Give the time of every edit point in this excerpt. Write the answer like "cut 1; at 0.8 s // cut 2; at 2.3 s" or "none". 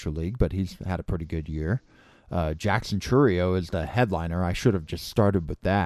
none

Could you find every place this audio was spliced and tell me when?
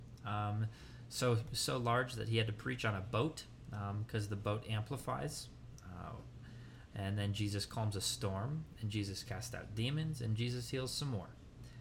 none

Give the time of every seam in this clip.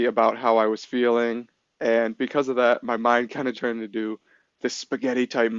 cut 1; at 3.5 s

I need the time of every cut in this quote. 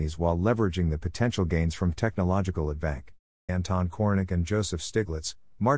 cut 1; at 3.5 s

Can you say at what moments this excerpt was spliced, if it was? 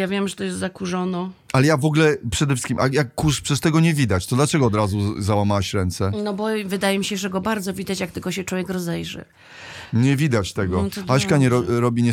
none

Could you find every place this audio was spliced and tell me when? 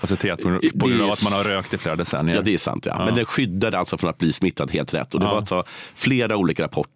none

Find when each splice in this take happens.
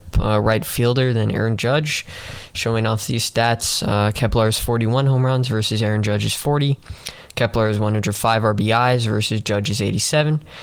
none

